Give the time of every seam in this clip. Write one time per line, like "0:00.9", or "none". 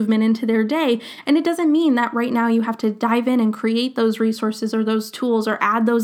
0:01.2